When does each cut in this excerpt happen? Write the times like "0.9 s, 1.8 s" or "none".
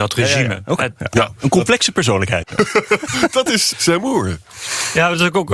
2.4 s, 3.7 s